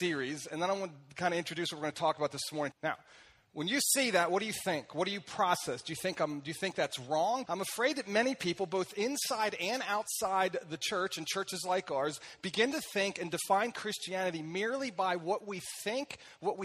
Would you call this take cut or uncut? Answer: cut